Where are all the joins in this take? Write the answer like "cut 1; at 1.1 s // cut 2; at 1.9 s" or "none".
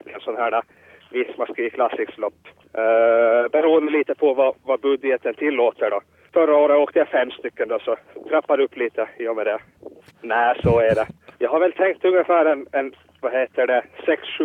cut 1; at 6.3 s // cut 2; at 10.1 s // cut 3; at 11.3 s